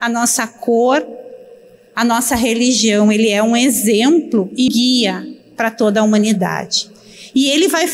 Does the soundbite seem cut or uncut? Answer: cut